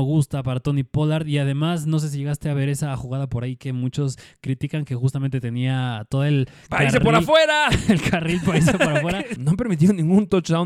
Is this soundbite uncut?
no; 1 cut; at 9.4 s

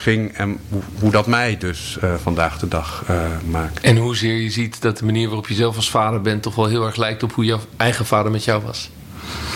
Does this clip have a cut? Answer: no; 0 cuts

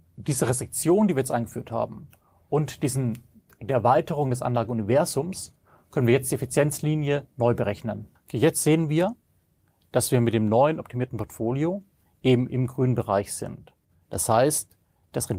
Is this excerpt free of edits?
no; 1 cut; at 8.2 s

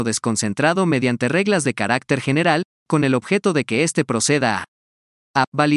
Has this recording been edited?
no; 0 cuts

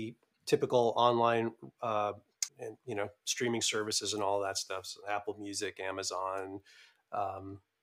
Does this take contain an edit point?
yes; 1 cut; at 2.5 s

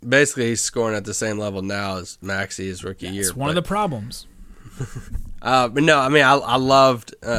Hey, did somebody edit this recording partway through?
no; 0 cuts

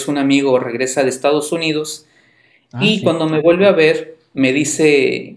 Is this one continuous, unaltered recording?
yes; 0 cuts

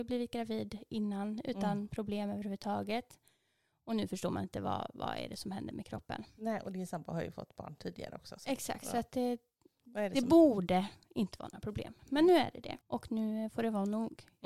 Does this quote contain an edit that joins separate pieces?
yes; 1 cut; at 12.8 s

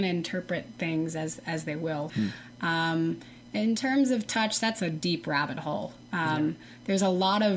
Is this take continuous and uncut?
no; 1 cut; at 2.1 s

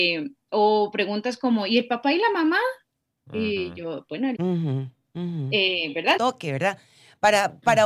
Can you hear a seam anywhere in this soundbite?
yes; 2 cuts; at 4.3 s, 6.2 s

